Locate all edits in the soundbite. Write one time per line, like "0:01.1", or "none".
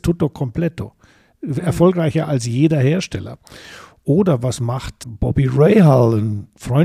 0:05.0